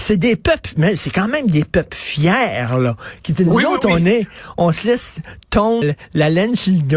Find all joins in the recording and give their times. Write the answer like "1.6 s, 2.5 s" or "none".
5.8 s